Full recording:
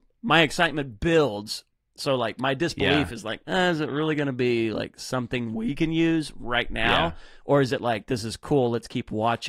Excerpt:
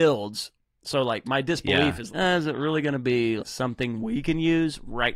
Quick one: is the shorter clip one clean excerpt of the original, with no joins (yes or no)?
no